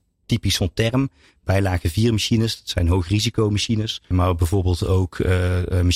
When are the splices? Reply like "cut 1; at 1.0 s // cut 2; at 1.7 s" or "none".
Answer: cut 1; at 4.1 s